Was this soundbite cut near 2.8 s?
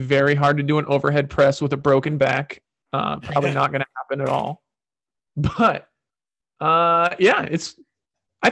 no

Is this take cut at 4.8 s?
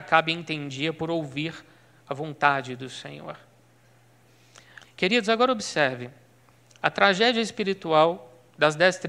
yes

